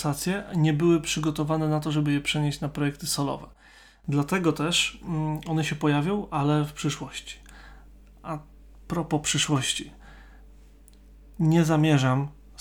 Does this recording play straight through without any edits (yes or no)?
yes